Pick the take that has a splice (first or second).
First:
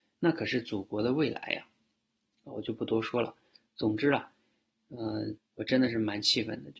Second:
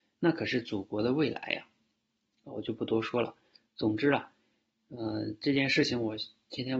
first